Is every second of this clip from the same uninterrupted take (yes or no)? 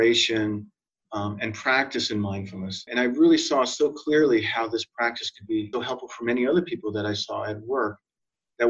no